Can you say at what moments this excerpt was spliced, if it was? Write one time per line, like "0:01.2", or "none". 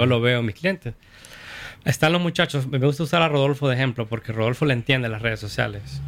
0:01.8